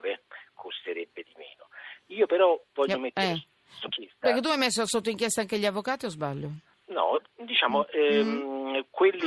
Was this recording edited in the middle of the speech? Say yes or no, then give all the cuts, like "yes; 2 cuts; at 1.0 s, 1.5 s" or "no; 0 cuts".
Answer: yes; 1 cut; at 3.8 s